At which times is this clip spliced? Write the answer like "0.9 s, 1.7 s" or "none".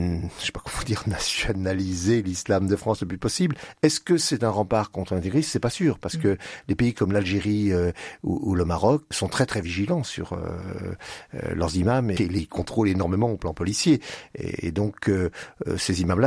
9.1 s, 12.2 s